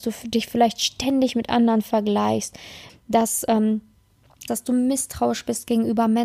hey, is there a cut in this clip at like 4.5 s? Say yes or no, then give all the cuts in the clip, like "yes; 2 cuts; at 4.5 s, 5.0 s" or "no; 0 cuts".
yes; 2 cuts; at 2.9 s, 4.5 s